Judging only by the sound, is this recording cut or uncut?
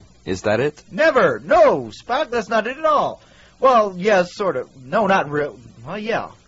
uncut